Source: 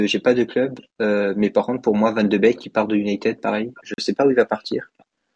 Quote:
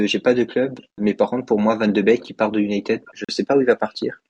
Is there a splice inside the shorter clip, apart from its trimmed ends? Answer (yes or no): yes